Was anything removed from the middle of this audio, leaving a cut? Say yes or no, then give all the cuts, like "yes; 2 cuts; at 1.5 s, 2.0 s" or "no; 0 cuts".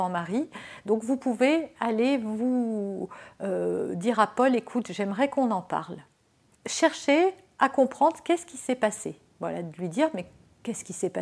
no; 0 cuts